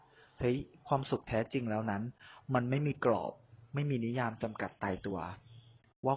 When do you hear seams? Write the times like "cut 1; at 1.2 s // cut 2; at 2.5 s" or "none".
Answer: none